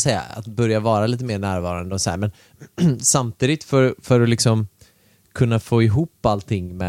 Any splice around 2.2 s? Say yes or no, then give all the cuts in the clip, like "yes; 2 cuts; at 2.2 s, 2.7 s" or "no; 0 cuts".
no; 0 cuts